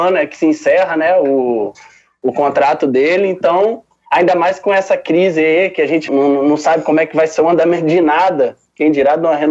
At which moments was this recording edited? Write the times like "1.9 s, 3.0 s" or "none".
6.1 s